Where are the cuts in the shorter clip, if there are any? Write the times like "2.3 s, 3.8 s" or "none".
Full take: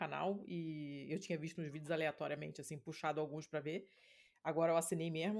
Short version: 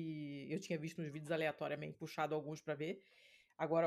1.9 s